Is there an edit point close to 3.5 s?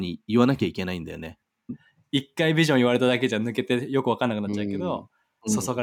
no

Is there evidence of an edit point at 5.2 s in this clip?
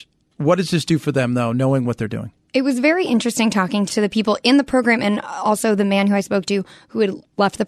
no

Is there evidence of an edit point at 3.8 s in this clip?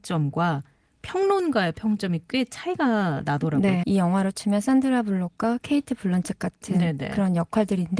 yes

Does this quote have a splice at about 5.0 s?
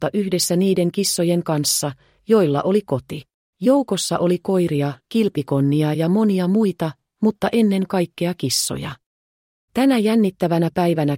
yes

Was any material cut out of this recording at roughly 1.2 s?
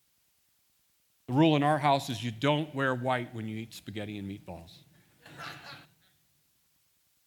no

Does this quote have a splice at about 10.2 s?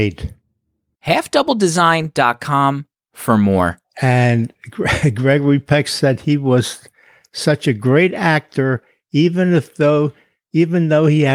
no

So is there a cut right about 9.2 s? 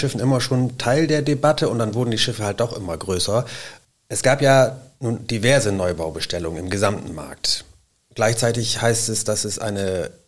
no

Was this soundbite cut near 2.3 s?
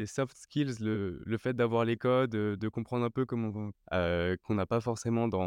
no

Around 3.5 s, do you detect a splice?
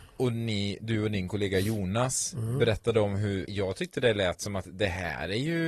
yes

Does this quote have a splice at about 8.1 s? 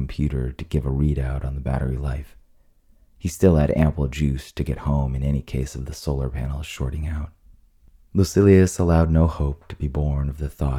yes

